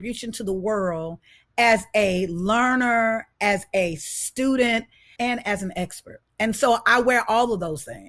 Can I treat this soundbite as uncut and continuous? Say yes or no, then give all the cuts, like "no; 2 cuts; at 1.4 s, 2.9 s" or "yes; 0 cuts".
no; 1 cut; at 5.2 s